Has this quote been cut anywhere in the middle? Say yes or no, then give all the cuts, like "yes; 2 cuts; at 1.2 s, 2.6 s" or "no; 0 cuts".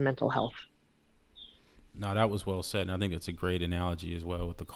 no; 0 cuts